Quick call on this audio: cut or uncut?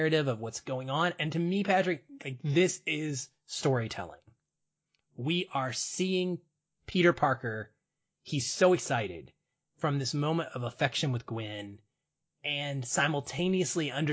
uncut